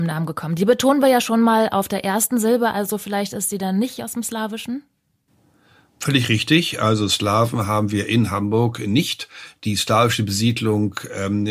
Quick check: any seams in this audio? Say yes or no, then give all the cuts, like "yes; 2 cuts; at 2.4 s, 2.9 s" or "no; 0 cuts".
no; 0 cuts